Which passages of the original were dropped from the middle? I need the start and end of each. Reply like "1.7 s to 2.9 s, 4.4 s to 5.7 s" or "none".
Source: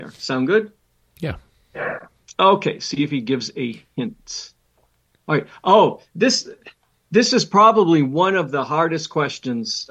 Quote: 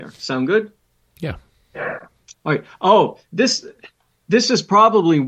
2.3 s to 5.2 s